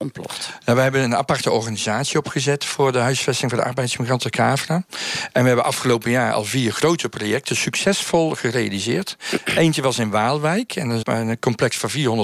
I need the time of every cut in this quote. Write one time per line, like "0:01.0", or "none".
0:11.0